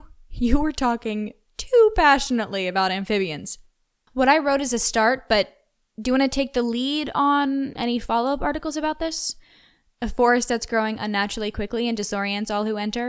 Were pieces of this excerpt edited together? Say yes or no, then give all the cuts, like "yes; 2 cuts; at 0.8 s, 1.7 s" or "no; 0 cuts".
yes; 1 cut; at 4.1 s